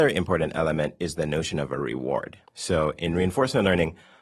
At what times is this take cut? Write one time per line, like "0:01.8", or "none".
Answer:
0:02.5